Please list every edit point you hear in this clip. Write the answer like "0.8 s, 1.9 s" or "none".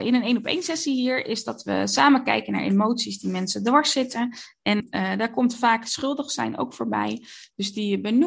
4.8 s